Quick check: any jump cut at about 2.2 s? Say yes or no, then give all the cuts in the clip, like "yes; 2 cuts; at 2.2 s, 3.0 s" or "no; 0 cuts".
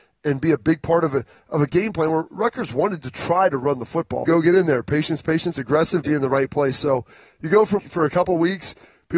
no; 3 cuts; at 4.2 s, 6.0 s, 7.8 s